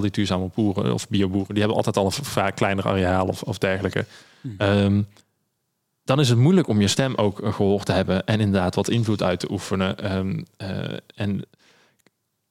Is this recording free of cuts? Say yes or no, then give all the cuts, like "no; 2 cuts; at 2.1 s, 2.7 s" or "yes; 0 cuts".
yes; 0 cuts